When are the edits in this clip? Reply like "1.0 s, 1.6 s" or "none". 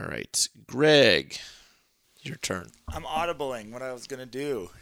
2.0 s